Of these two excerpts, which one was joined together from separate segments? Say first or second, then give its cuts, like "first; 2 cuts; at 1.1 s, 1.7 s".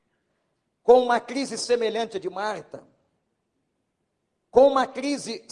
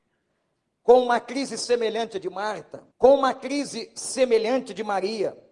second; 1 cut; at 2.9 s